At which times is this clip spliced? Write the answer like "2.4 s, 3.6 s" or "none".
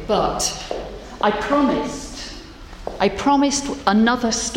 none